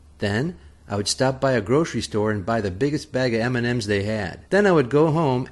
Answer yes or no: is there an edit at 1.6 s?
no